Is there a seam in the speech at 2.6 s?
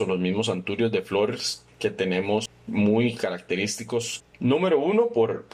no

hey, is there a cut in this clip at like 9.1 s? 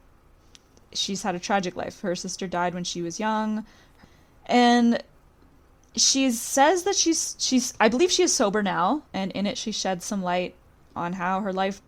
yes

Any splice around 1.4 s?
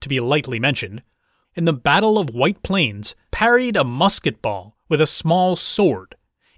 yes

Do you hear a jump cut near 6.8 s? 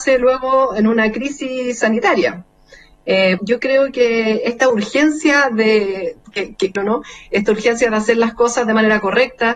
yes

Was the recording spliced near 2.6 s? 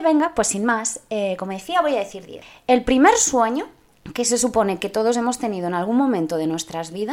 no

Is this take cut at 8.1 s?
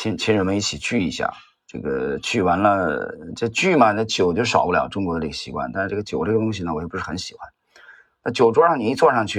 no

